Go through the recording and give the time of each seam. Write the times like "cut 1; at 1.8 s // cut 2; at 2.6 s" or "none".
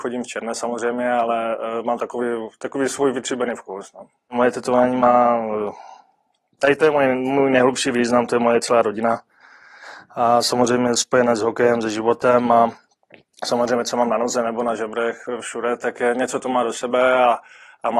none